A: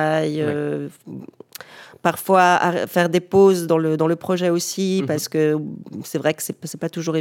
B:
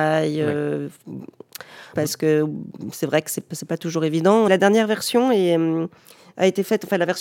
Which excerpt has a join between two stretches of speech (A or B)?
B